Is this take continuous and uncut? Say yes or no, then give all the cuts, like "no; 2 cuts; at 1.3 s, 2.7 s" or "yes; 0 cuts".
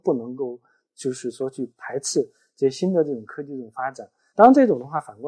yes; 0 cuts